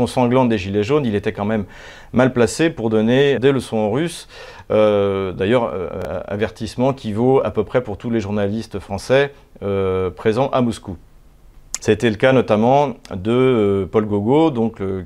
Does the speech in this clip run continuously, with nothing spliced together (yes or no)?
no